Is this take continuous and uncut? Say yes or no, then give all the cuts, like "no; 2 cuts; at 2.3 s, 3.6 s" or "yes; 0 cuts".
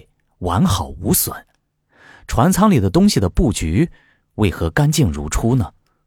yes; 0 cuts